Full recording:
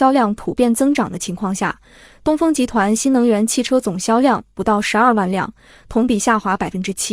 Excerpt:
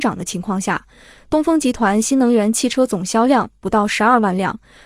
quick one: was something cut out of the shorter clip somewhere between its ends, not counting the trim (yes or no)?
no